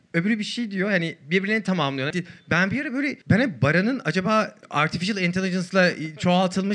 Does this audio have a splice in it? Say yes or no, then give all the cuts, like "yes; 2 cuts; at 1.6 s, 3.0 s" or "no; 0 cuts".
yes; 2 cuts; at 2.1 s, 3.2 s